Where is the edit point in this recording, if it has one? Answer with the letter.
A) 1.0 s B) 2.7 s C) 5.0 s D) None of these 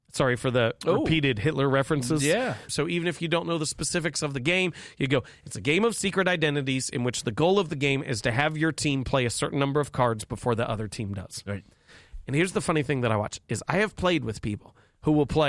B